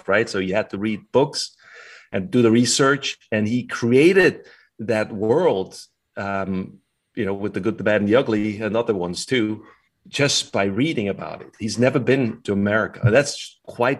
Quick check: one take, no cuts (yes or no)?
yes